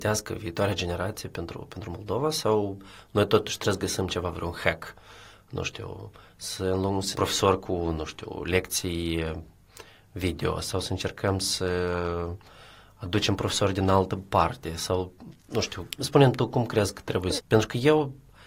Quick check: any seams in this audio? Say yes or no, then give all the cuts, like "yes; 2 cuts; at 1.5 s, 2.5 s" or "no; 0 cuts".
yes; 3 cuts; at 7.1 s, 16.0 s, 17.4 s